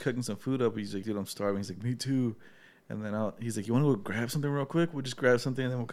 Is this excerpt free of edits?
no; 1 cut; at 1.0 s

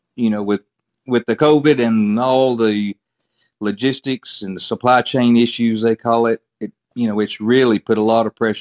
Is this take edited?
no; 0 cuts

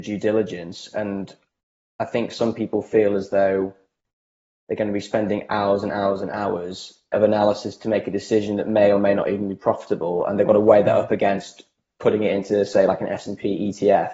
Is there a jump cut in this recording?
yes; 1 cut; at 7.1 s

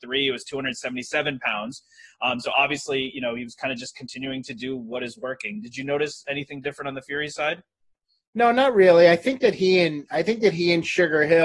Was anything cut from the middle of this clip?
no; 0 cuts

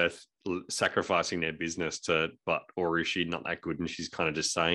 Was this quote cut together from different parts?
no; 0 cuts

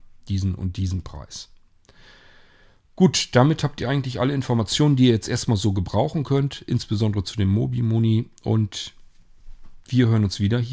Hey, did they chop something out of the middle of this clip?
no; 0 cuts

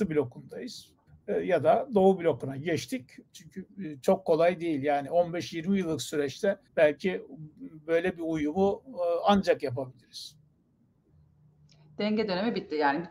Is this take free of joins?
no; 3 cuts; at 1.1 s, 3.3 s, 6.7 s

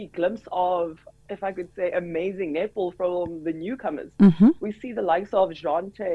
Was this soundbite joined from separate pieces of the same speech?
no; 0 cuts

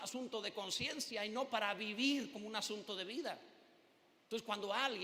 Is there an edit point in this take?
no; 0 cuts

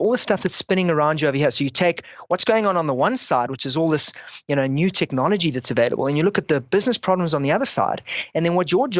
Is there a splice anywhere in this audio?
no; 0 cuts

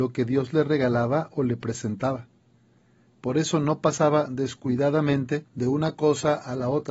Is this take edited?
yes; 2 cuts; at 3.1 s, 5.5 s

